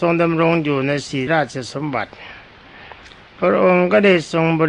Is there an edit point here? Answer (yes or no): yes